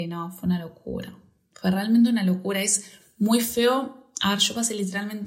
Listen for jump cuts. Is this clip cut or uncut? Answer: uncut